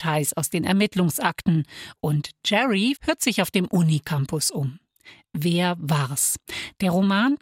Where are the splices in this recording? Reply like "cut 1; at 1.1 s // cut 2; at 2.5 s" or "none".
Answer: cut 1; at 3.0 s